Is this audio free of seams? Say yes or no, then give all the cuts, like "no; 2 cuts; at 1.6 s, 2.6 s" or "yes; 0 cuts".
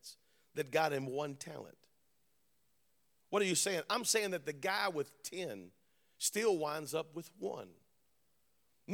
yes; 0 cuts